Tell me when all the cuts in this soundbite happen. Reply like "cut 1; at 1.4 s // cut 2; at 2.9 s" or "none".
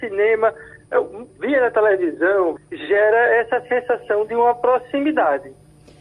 cut 1; at 1.3 s // cut 2; at 2.6 s